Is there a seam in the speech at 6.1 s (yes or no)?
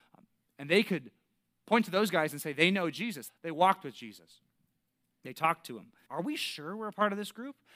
yes